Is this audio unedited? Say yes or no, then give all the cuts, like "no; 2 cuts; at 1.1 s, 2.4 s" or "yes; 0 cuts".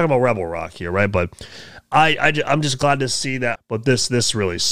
no; 1 cut; at 3.6 s